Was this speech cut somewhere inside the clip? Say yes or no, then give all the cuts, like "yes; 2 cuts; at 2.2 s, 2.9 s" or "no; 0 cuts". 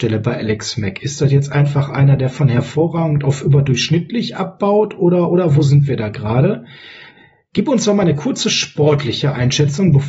no; 0 cuts